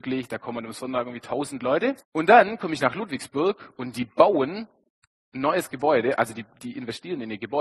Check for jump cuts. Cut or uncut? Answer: cut